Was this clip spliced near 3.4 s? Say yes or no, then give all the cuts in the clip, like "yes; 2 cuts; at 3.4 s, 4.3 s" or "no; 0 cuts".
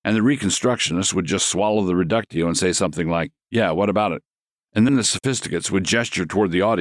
no; 1 cut; at 4.9 s